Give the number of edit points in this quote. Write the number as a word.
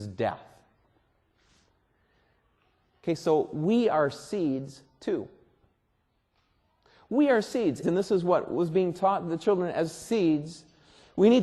one